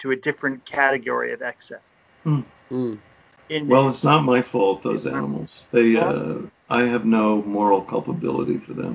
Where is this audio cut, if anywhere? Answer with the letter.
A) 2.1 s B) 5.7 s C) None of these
B